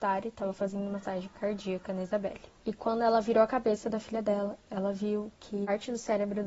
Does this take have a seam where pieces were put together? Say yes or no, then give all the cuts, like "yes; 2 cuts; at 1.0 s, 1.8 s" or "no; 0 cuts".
yes; 1 cut; at 2.6 s